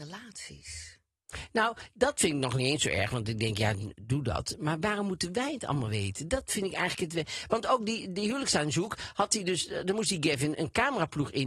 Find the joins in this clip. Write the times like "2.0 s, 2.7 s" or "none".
10.5 s